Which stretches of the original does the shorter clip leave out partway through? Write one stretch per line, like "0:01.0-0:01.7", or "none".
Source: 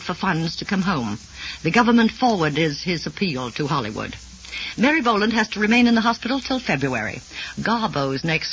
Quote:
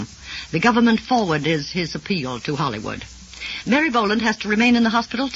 none